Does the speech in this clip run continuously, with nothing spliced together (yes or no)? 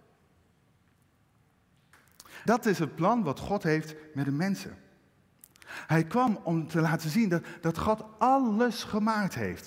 no